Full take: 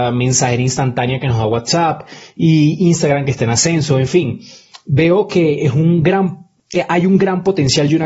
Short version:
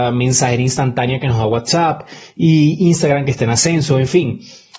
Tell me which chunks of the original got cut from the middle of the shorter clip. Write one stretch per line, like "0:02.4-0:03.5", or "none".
none